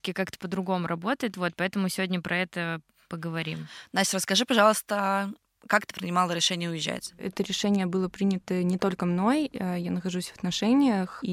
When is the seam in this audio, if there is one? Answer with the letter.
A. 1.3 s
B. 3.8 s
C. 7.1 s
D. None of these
D